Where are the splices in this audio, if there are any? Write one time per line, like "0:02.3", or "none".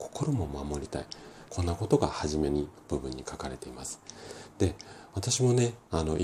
0:01.5